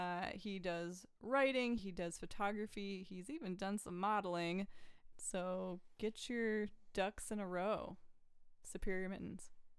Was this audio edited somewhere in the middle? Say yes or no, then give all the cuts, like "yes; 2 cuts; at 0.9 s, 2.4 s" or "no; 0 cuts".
yes; 2 cuts; at 1.8 s, 5.1 s